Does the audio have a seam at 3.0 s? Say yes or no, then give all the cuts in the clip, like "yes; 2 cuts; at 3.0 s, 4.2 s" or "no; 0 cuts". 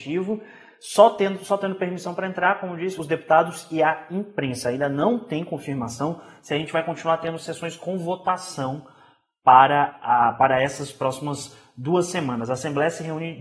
yes; 1 cut; at 3.0 s